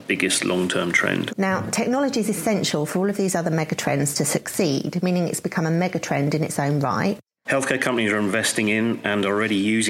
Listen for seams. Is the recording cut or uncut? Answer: cut